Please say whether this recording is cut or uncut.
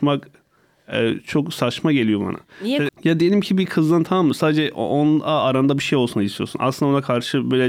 cut